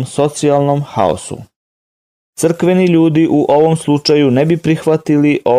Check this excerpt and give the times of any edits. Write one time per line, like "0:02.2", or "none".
0:02.3